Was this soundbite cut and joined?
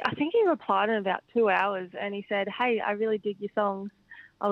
no; 0 cuts

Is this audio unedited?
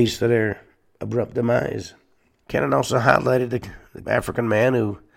no; 2 cuts; at 2.4 s, 4.0 s

